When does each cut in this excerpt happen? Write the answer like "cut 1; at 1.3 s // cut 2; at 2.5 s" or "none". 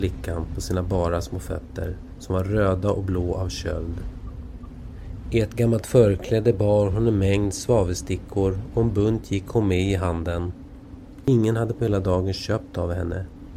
none